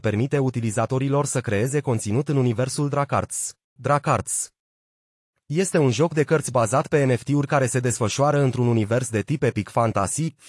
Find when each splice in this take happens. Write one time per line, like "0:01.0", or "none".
0:03.8